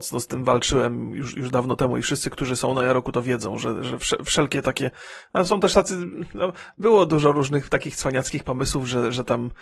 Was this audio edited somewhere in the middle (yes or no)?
no